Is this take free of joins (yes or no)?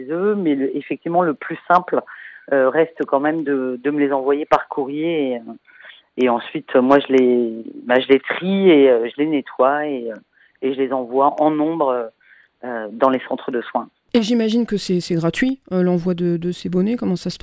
yes